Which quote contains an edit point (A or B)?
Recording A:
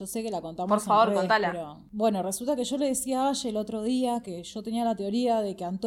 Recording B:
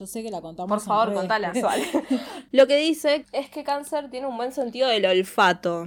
B